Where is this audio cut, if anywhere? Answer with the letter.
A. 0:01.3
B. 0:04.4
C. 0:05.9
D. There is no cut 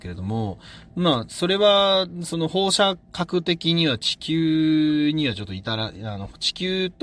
D